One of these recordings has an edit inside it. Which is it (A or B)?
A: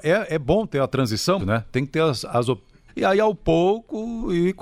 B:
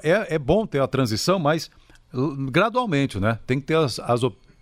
A